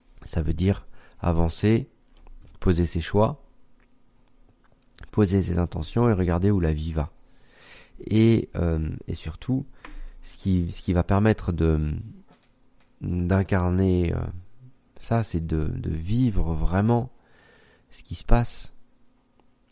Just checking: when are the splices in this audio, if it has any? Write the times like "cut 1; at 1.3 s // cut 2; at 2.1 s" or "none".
none